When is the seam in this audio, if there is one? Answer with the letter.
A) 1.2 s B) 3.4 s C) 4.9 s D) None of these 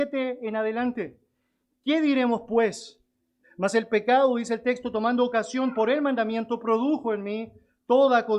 B